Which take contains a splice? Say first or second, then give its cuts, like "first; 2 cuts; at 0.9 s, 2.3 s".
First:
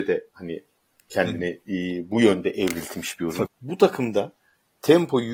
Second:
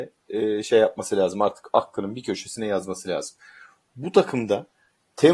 first; 1 cut; at 3.5 s